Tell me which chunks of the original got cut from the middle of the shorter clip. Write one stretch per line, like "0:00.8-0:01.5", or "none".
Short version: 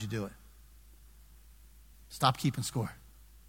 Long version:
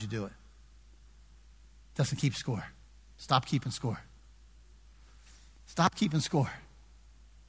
0:01.9-0:03.0